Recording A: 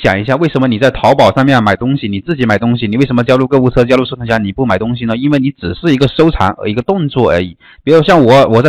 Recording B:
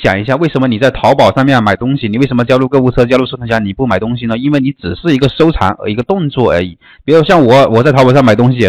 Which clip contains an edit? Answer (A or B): B